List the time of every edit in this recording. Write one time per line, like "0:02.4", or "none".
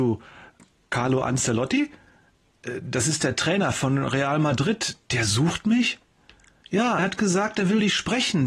0:07.0